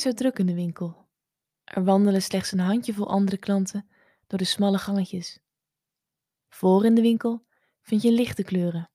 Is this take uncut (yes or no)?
no